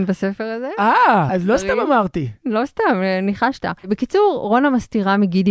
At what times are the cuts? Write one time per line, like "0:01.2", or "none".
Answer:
0:01.3
0:03.8